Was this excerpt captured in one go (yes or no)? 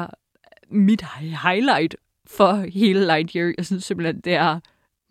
yes